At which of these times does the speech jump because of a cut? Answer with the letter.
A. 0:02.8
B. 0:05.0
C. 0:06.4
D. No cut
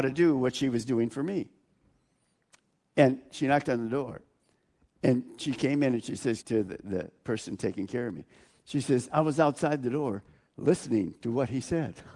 C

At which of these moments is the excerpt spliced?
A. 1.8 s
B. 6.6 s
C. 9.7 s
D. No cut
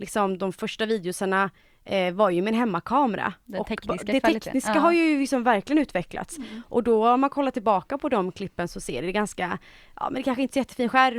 D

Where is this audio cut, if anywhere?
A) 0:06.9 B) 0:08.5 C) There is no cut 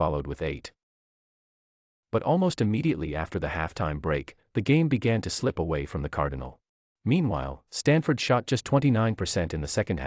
A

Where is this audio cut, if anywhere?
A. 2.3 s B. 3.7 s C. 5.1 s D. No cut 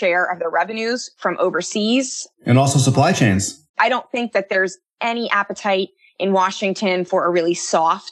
B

